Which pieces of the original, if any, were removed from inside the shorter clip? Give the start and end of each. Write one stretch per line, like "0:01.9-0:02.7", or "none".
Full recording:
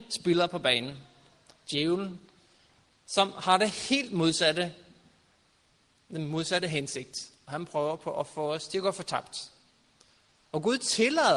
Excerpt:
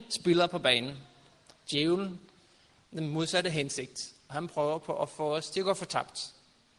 0:02.9-0:06.0